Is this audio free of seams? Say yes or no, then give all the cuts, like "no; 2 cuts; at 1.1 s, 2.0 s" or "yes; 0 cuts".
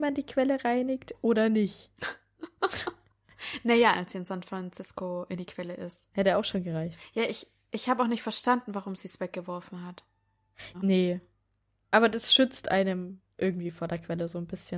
no; 3 cuts; at 3.9 s, 6.1 s, 10.7 s